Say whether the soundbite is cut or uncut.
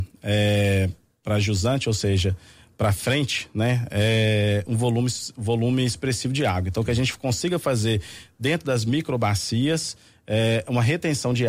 uncut